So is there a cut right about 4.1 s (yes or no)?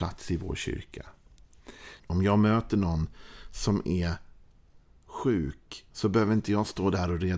no